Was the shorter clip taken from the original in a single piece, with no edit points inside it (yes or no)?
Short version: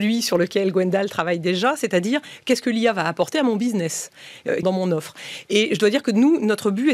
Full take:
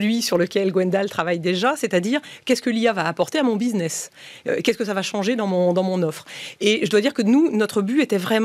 no